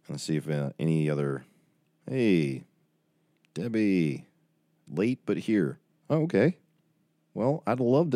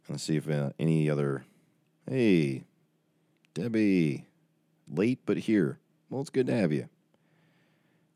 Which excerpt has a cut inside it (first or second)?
first